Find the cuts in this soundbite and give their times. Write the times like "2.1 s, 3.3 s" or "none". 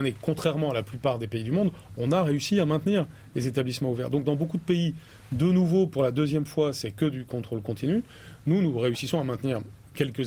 none